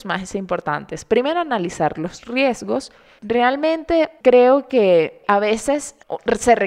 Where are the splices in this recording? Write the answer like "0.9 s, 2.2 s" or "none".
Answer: 3.2 s